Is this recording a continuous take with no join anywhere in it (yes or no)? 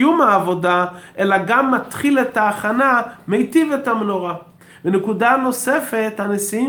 yes